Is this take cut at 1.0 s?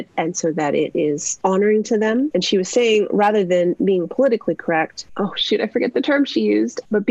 no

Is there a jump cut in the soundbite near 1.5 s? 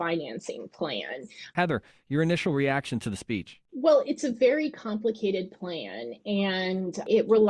yes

